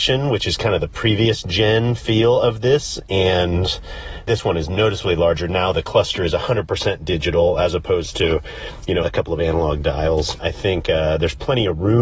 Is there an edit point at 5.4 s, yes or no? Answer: no